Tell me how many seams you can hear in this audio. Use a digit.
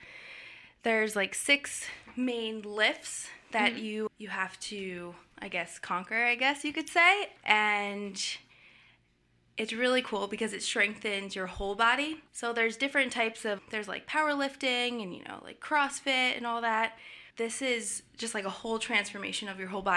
2